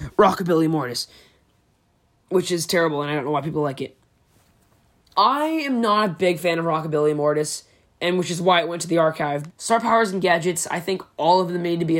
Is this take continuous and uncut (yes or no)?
no